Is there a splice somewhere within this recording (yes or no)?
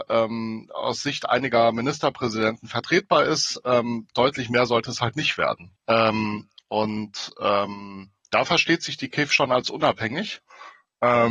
yes